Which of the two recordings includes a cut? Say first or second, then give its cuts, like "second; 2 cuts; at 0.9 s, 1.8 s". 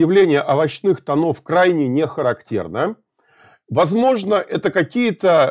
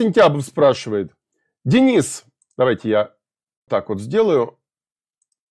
second; 1 cut; at 3.7 s